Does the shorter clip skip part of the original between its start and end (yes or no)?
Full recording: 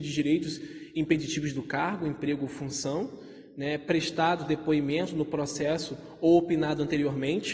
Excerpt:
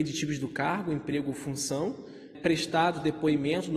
yes